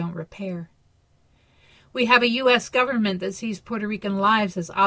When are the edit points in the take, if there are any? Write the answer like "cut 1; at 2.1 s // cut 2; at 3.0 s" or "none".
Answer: none